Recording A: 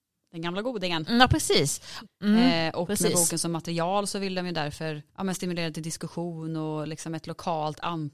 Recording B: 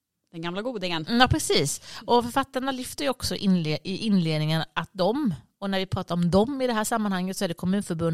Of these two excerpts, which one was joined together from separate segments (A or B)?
A